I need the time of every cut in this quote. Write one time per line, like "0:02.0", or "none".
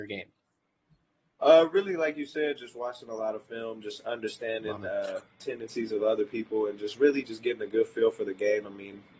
none

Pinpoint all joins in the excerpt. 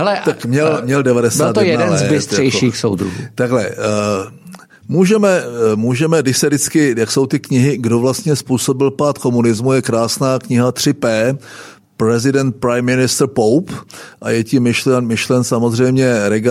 none

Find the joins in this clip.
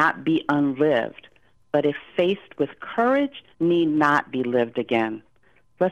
0:03.5

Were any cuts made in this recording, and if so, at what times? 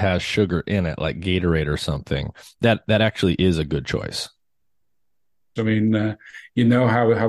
0:05.6

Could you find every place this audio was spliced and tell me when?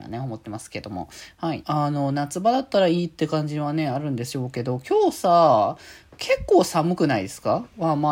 0:01.6

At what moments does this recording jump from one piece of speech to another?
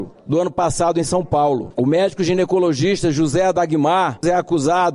0:01.7

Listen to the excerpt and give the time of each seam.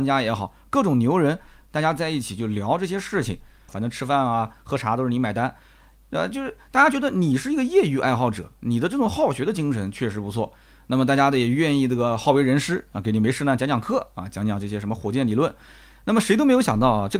0:03.7

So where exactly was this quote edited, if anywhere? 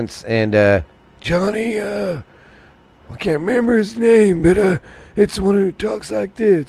none

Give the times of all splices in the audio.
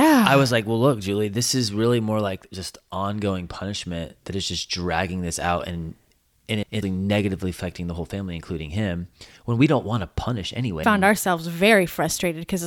0:06.8
0:10.8

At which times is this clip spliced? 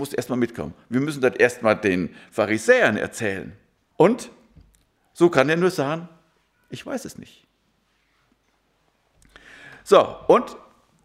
0:03.9

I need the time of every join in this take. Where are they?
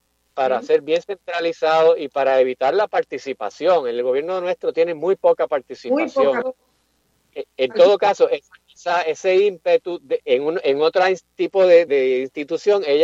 0:06.4
0:10.2
0:11.9

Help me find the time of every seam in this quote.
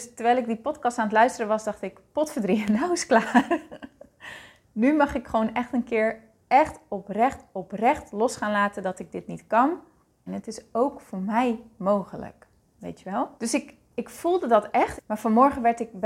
0:10.3
0:13.4
0:15.0

